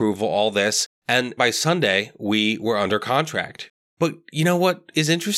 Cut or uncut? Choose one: cut